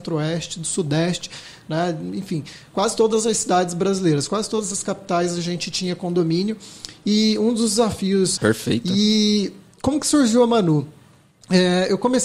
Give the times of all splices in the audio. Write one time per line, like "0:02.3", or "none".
0:08.4